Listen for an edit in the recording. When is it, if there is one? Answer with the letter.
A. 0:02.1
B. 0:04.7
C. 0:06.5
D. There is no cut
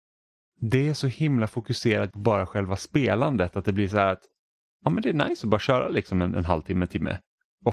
A